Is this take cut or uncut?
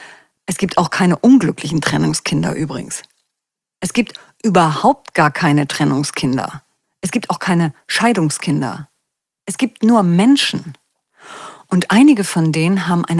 uncut